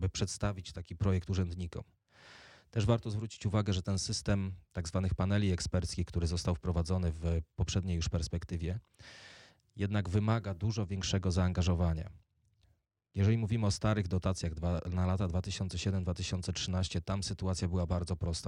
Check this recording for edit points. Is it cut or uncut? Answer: cut